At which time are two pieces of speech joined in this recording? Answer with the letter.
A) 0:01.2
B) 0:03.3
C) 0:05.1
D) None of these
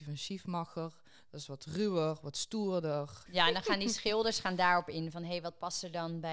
B